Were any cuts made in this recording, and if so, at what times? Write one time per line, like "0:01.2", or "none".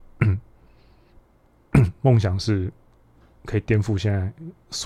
none